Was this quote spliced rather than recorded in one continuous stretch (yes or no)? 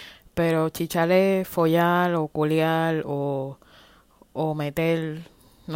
no